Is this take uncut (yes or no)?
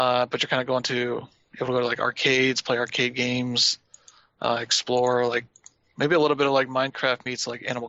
yes